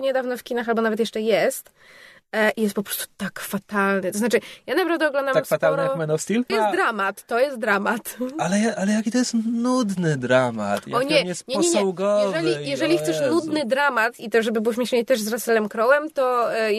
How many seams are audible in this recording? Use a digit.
1